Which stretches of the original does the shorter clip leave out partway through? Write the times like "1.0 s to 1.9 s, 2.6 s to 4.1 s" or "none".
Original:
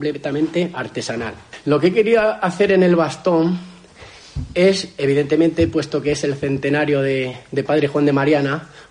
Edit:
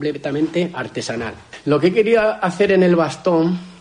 none